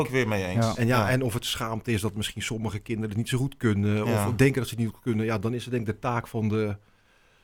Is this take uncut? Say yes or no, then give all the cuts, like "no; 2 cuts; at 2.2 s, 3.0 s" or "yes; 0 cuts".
yes; 0 cuts